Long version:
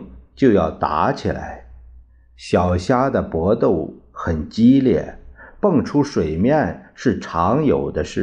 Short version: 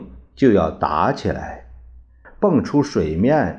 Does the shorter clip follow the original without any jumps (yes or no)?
no